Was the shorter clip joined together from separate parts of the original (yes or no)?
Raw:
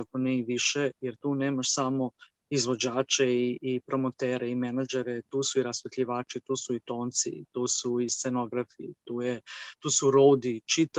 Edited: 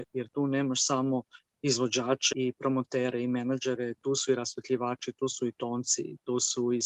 yes